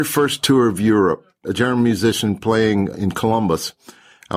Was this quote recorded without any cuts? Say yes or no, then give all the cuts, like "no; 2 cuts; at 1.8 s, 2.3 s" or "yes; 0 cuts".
no; 2 cuts; at 1.4 s, 2.9 s